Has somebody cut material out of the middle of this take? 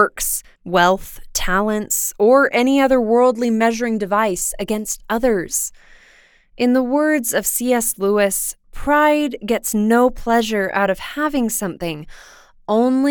no; 0 cuts

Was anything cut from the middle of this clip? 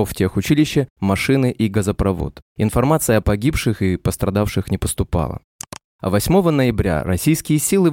no; 0 cuts

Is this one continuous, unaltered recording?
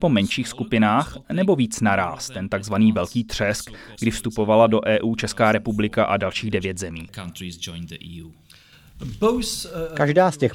no; 1 cut; at 3.9 s

